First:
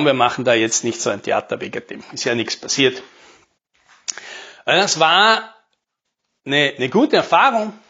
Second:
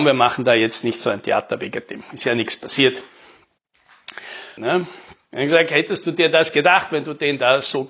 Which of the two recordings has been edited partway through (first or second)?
second